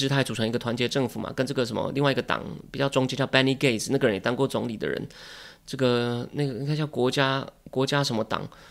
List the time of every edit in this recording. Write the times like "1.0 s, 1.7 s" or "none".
none